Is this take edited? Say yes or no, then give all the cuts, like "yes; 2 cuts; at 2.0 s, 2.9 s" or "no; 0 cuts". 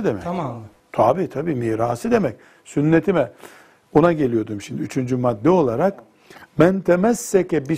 no; 0 cuts